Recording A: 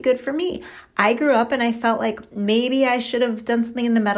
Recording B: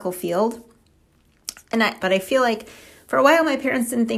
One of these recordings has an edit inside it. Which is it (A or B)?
B